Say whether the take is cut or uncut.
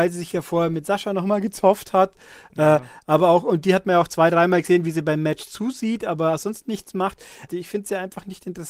cut